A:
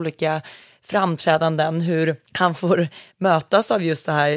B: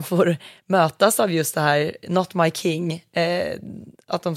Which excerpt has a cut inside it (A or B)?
A